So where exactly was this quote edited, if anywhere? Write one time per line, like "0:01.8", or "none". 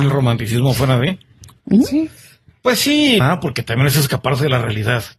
0:03.2

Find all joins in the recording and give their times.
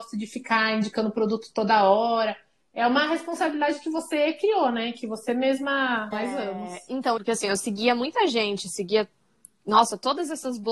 0:06.1
0:07.2

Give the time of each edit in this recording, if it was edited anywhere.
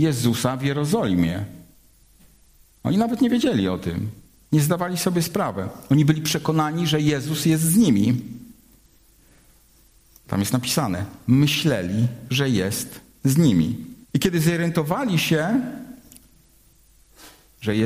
0:14.0

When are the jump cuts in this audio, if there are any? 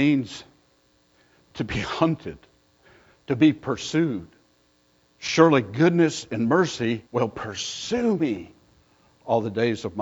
0:05.0
0:07.1

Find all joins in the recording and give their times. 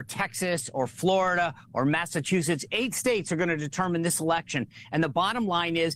none

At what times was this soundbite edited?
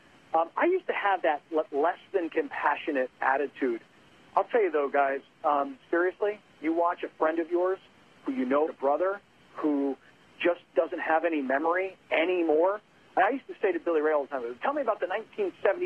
0:08.7
0:14.6

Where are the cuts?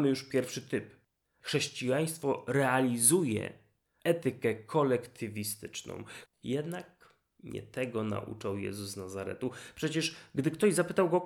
0:06.3

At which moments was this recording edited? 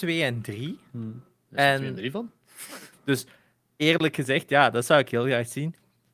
0:02.9

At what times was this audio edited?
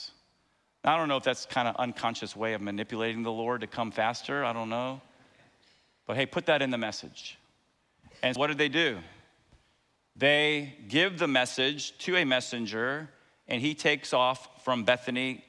0:08.4

